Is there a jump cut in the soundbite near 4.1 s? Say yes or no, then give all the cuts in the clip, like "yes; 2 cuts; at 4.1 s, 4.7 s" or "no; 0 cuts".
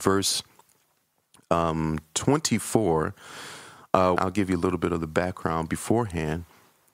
yes; 1 cut; at 4.1 s